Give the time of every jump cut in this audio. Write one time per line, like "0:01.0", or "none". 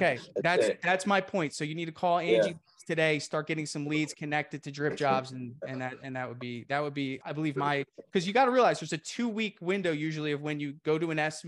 0:07.2